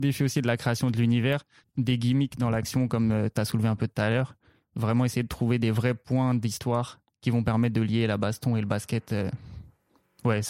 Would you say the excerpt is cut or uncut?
cut